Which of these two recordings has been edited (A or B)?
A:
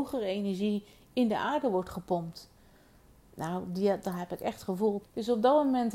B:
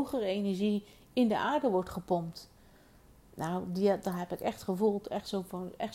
A